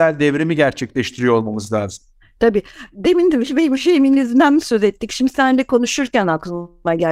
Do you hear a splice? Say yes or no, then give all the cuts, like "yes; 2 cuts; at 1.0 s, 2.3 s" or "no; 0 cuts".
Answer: no; 0 cuts